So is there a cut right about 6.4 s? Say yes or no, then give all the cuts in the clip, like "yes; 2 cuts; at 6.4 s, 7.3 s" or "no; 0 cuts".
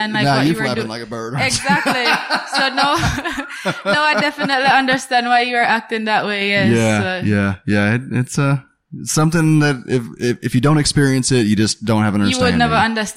no; 0 cuts